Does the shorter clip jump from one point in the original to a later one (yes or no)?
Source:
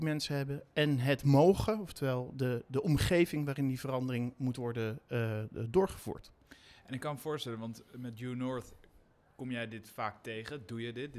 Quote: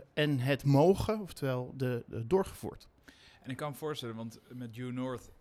yes